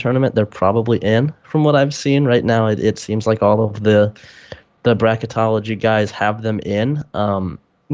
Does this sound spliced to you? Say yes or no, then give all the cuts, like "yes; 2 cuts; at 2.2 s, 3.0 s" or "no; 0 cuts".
no; 0 cuts